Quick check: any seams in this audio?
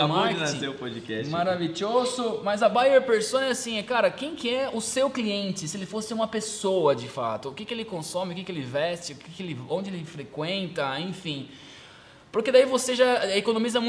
no; 0 cuts

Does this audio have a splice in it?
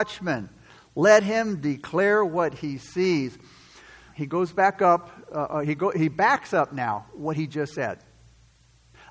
yes; 1 cut; at 4.1 s

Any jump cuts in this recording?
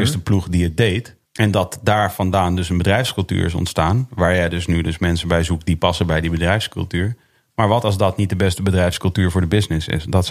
yes; 1 cut; at 1.3 s

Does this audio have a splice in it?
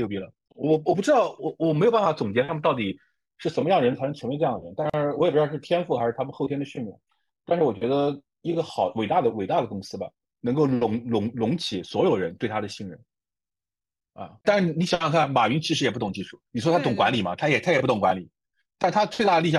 yes; 3 cuts; at 10.2 s, 14.4 s, 16.5 s

